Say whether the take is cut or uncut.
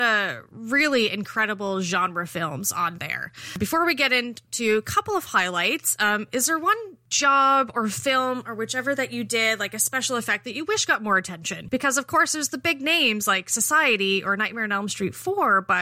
uncut